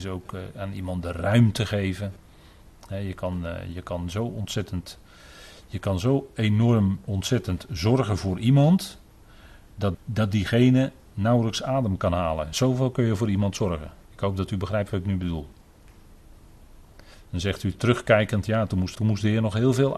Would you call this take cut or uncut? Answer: cut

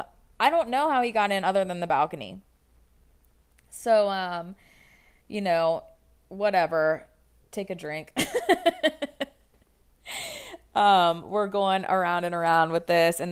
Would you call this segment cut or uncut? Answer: uncut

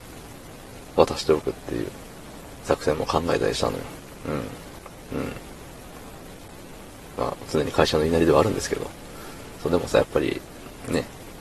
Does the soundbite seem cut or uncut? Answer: cut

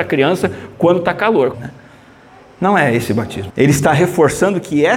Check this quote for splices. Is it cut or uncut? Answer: cut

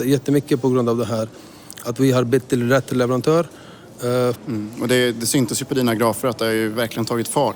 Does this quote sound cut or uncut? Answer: cut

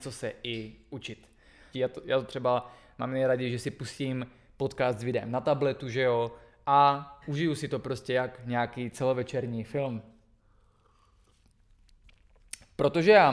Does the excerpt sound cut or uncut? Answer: cut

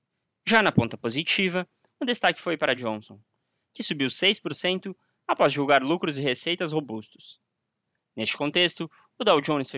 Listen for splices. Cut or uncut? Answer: cut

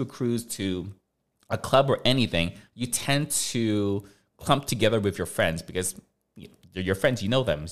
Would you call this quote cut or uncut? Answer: uncut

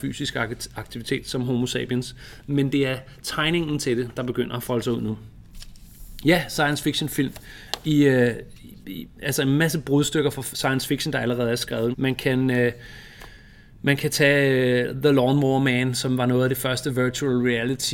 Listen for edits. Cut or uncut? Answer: cut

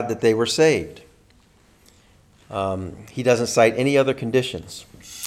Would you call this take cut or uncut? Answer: uncut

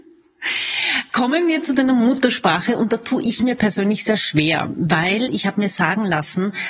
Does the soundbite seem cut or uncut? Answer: uncut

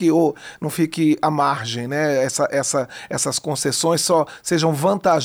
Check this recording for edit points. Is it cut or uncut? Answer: uncut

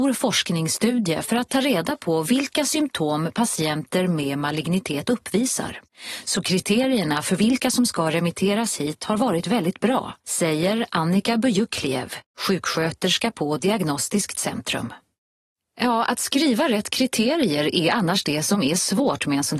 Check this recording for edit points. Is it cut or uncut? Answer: uncut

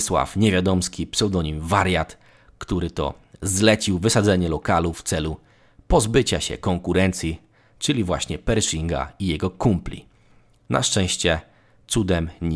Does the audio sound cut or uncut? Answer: cut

